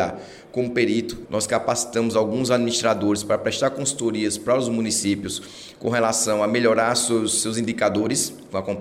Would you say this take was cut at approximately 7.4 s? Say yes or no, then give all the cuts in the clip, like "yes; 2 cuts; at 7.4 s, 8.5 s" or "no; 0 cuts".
no; 1 cut; at 1.2 s